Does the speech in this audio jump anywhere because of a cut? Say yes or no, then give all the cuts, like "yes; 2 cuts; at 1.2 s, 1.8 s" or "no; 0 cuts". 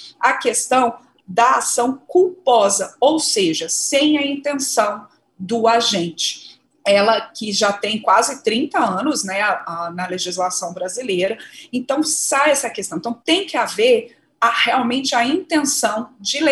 yes; 1 cut; at 6.7 s